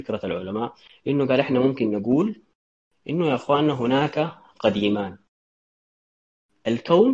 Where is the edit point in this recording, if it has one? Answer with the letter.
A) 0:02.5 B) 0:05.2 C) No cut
C